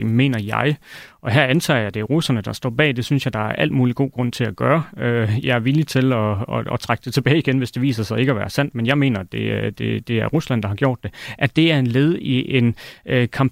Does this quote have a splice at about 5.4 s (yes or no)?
no